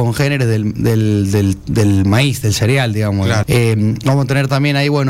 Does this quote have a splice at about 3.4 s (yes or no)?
yes